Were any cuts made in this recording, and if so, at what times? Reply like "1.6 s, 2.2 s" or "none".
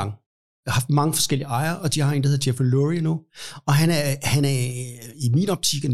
none